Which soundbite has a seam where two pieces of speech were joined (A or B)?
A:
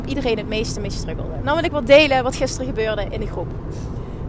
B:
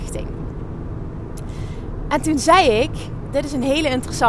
A